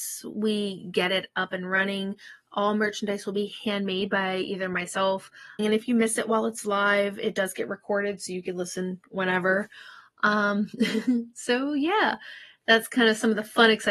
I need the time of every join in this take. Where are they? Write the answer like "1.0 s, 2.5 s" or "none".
5.6 s

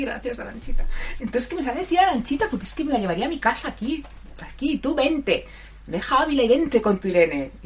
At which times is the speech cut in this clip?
1.2 s

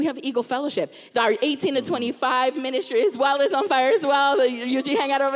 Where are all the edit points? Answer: 1.1 s

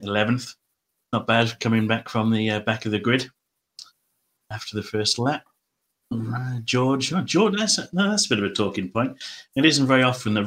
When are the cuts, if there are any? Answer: none

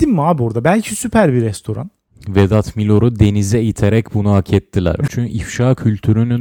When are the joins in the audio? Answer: 2.1 s, 5.1 s

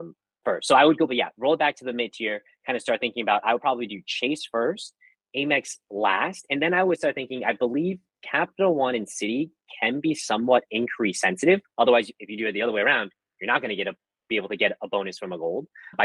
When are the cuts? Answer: 1.1 s, 11.7 s

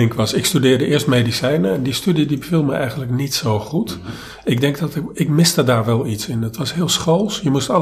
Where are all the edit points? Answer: none

